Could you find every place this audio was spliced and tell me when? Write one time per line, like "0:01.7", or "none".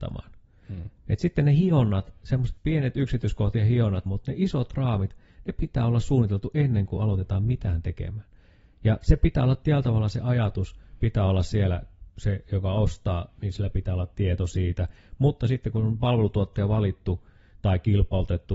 0:02.6
0:04.1